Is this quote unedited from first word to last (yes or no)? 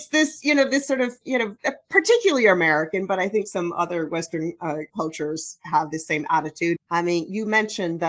no